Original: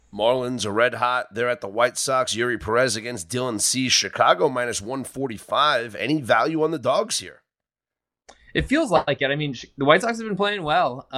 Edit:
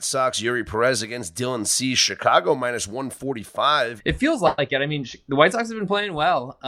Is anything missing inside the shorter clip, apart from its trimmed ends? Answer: yes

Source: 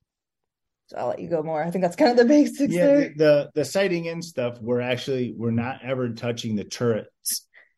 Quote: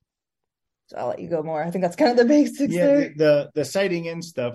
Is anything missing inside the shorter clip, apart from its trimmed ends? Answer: no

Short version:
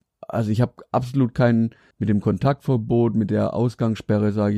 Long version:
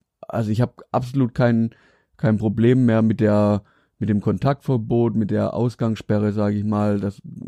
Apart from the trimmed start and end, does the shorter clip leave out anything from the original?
yes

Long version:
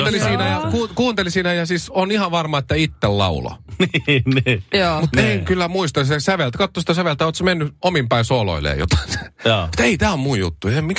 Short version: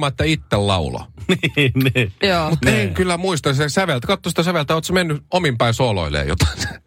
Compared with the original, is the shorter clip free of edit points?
yes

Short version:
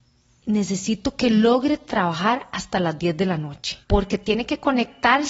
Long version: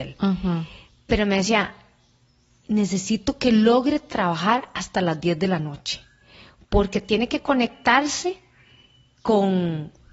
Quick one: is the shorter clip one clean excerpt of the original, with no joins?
no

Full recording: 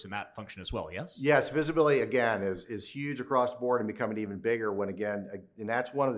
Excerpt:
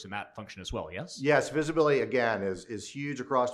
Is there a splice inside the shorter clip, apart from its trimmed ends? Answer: no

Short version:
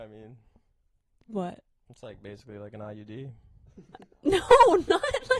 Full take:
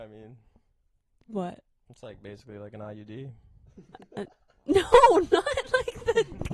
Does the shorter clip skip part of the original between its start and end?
yes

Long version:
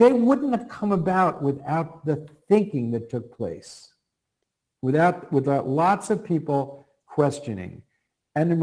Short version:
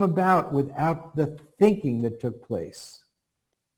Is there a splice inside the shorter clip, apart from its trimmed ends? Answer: no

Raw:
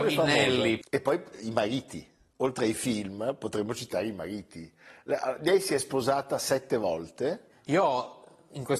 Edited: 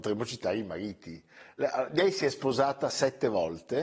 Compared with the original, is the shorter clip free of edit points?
yes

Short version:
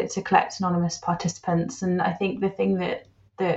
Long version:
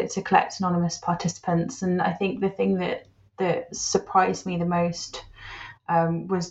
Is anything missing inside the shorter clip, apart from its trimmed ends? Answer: no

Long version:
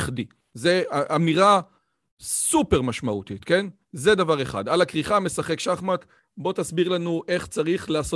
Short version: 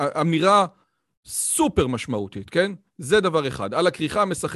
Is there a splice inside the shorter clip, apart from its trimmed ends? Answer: no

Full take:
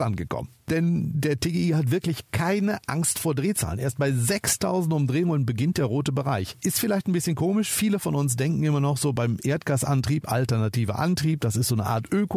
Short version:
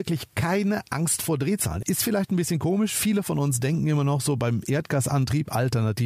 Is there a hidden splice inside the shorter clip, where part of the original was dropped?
yes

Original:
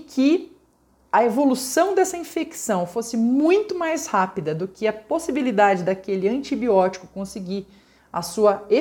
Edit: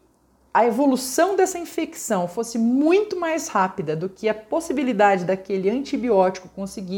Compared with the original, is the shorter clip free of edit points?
yes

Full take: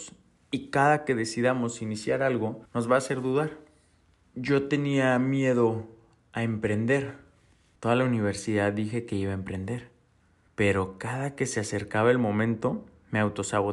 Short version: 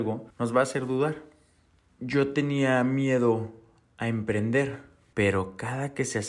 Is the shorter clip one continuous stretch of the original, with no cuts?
no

